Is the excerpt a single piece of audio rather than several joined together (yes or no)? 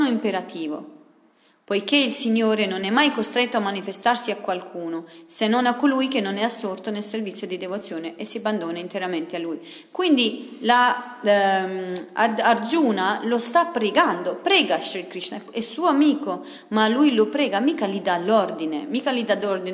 yes